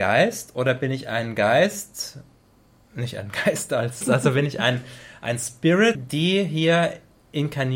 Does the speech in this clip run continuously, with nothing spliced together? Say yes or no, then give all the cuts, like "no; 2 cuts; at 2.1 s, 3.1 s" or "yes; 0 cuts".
no; 2 cuts; at 4.0 s, 5.9 s